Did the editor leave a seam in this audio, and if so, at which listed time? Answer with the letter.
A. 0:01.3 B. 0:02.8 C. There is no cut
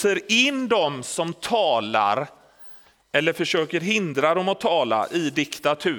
C